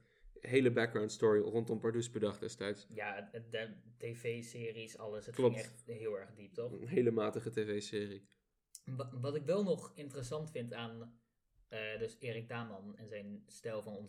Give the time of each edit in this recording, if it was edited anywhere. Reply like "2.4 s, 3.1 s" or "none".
none

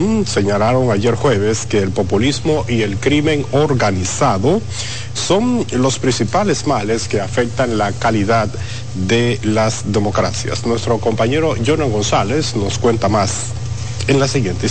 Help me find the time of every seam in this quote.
5.1 s

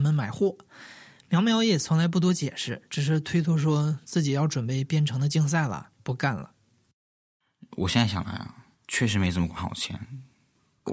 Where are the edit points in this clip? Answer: 8.7 s

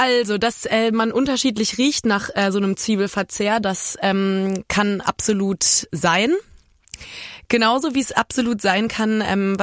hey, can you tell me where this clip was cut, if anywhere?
none

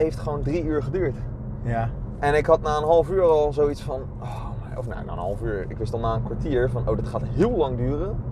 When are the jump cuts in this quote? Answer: none

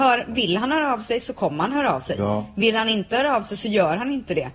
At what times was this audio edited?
none

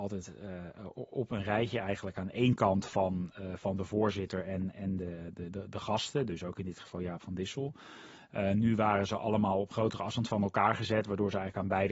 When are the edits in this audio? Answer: none

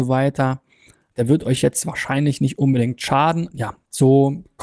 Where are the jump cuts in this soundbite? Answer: 1.1 s, 3.5 s

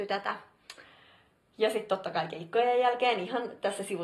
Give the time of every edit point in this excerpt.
none

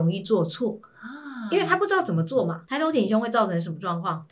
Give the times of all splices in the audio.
2.6 s

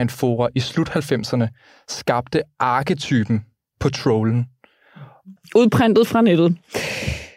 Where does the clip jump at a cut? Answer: 5.4 s

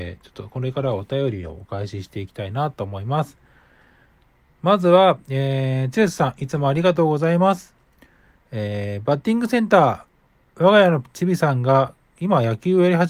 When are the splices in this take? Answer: none

